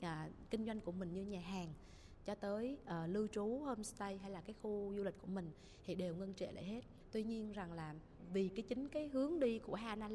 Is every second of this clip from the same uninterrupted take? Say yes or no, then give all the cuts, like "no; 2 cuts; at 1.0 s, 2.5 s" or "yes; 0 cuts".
yes; 0 cuts